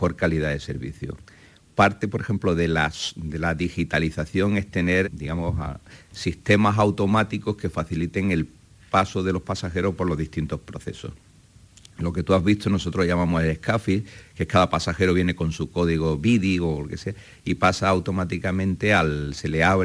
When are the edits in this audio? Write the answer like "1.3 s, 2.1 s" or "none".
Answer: 5.0 s